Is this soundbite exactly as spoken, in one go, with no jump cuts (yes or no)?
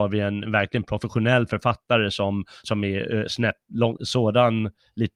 no